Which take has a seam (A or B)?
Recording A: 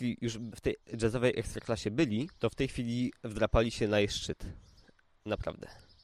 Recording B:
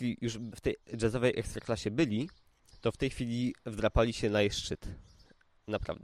A